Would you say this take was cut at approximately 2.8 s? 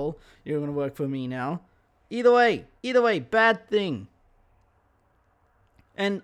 yes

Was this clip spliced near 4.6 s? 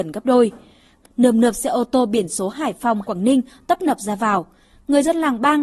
no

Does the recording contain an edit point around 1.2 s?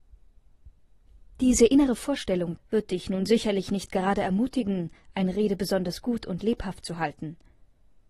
no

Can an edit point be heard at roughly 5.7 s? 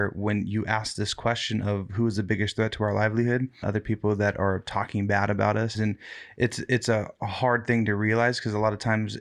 yes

